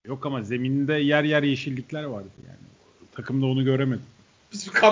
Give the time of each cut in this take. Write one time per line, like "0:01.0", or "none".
none